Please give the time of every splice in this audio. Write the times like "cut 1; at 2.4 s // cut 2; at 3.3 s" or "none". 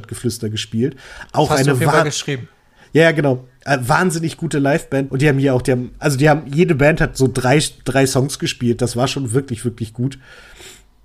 cut 1; at 5.1 s

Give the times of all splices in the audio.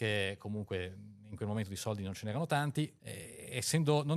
cut 1; at 3.0 s

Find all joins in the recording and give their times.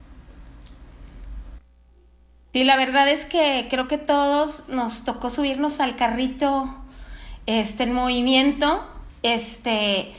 cut 1; at 9.1 s

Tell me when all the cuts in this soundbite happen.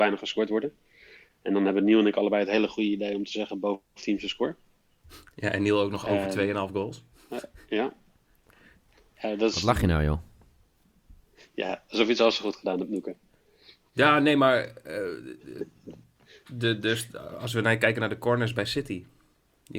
none

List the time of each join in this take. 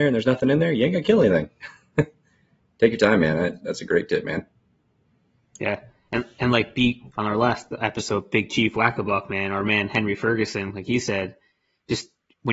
cut 1; at 7.1 s

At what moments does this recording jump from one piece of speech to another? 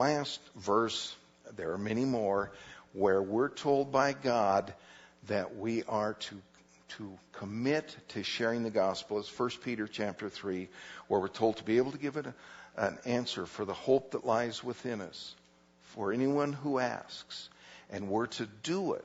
none

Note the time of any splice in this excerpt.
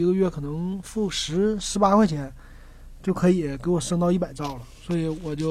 none

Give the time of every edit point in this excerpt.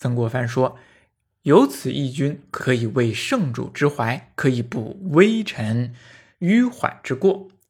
cut 1; at 2.6 s

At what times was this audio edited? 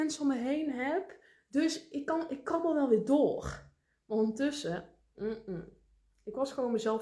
cut 1; at 5.1 s

